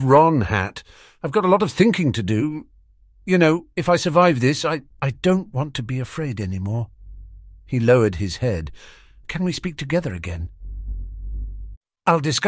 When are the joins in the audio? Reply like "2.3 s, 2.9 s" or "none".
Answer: 4.9 s, 9.2 s

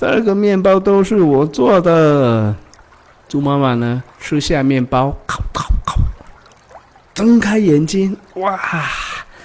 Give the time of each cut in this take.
4.1 s

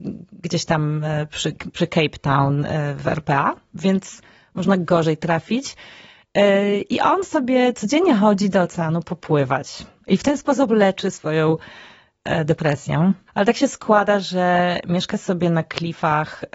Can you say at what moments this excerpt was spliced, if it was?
13.3 s

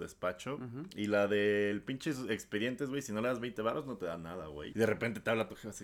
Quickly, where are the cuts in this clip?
4.7 s

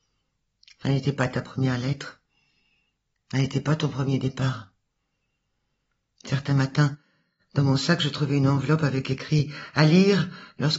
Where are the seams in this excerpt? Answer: none

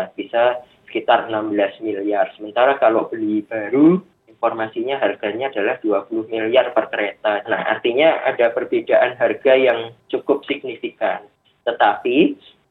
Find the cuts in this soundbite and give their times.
7.4 s

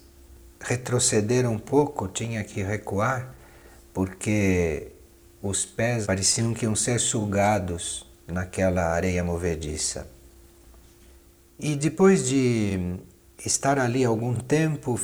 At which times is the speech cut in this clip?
6.0 s

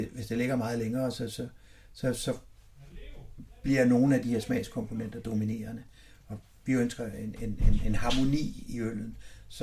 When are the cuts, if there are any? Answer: none

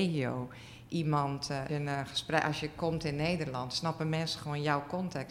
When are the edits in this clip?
1.7 s

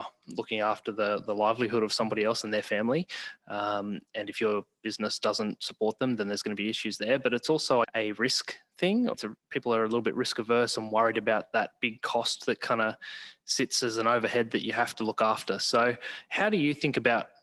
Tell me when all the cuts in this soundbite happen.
7.8 s, 9.1 s

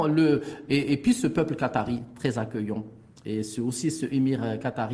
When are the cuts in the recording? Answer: none

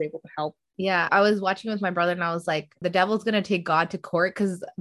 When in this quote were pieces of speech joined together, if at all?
1.1 s, 2.8 s

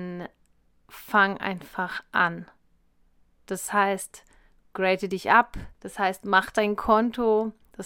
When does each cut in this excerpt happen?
5.8 s

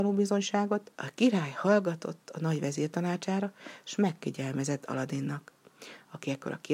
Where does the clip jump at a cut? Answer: 0.9 s

